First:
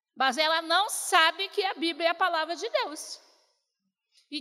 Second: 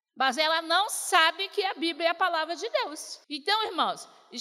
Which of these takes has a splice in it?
second; 1 cut; at 3.2 s

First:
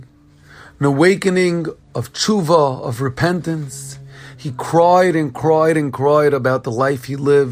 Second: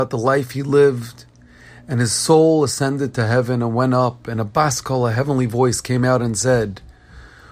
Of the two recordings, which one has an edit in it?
first; 1 cut; at 4.3 s

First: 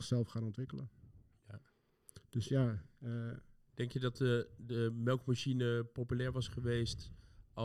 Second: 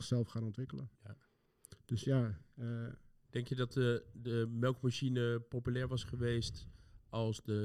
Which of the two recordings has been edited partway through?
second; 1 cut; at 1.0 s

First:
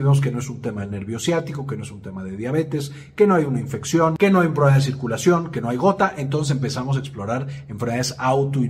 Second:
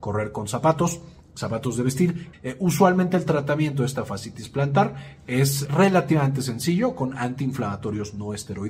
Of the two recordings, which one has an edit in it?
second; 2 cuts; at 2.3 s, 5.6 s

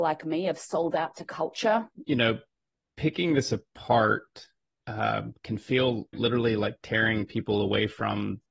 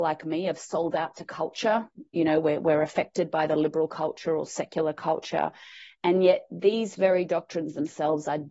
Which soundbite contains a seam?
first; 2 cuts; at 2.0 s, 6.1 s

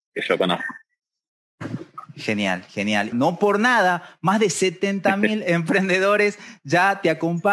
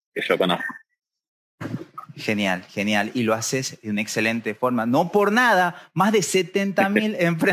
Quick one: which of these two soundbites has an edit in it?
first; 1 cut; at 3.1 s

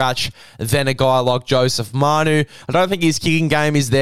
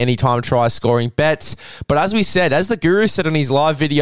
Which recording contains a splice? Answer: first; 1 cut; at 2.6 s

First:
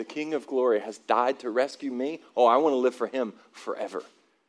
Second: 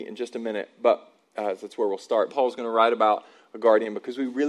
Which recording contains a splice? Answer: second; 1 cut; at 2.3 s

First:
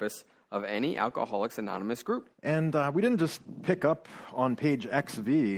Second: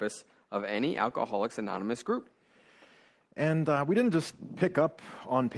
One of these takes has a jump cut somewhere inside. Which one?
first; 1 cut; at 2.3 s

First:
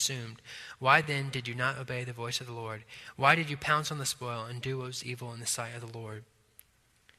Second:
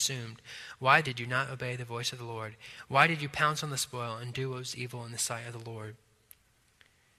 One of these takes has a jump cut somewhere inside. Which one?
second; 1 cut; at 1.0 s

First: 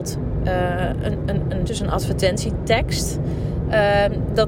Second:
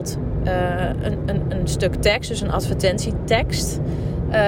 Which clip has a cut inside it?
first; 1 cut; at 1.7 s

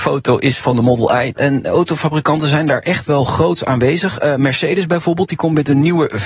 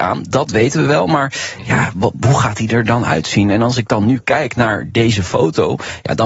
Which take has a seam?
first; 1 cut; at 1.3 s

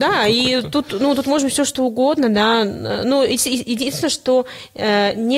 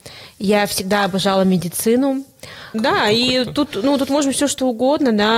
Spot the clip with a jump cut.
second; 1 cut; at 2.7 s

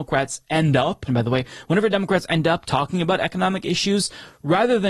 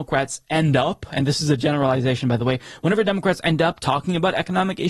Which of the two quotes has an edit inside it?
first; 1 cut; at 1.1 s

